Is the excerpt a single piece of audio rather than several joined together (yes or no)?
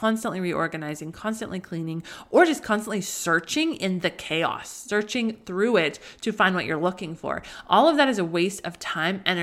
yes